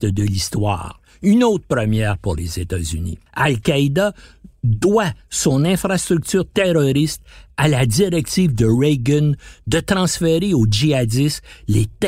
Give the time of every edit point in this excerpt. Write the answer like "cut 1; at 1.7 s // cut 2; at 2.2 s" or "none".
cut 1; at 3.3 s